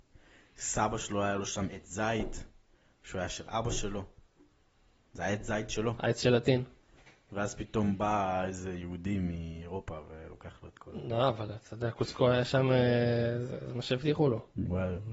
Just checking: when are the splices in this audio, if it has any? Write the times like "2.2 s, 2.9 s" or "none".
none